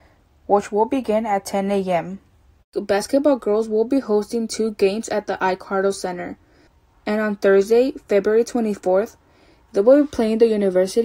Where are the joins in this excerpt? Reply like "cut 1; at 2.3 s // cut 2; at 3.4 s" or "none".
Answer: cut 1; at 2.6 s // cut 2; at 6.9 s